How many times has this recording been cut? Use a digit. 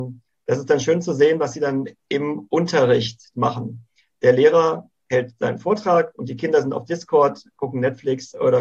1